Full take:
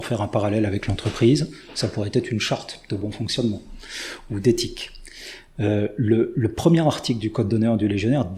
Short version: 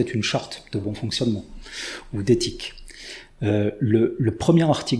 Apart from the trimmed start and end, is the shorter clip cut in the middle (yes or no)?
no